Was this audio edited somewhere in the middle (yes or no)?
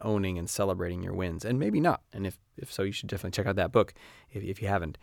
no